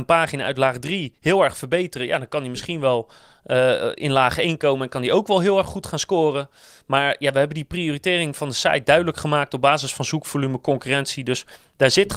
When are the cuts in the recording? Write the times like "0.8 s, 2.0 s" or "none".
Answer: none